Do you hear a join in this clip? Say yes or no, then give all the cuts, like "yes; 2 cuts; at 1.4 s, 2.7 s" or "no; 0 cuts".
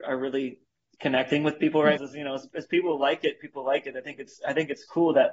yes; 1 cut; at 2.0 s